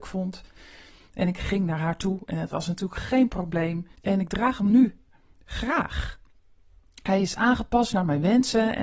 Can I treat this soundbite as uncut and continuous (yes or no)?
no